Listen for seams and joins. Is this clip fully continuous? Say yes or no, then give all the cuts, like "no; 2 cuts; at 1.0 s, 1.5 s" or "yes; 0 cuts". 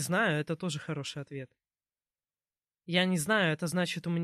yes; 0 cuts